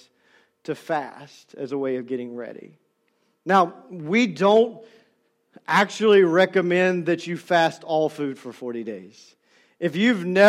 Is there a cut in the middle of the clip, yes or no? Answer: no